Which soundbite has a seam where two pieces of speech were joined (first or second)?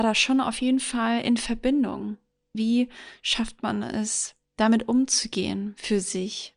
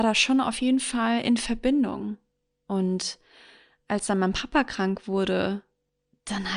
first